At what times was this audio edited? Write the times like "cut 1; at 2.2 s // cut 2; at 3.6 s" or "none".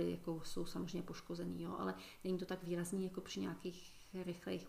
none